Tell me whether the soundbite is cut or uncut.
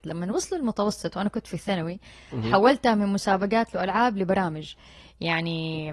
uncut